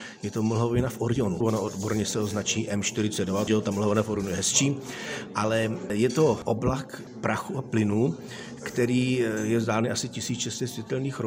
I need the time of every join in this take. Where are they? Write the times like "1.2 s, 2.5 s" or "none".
1.4 s, 3.5 s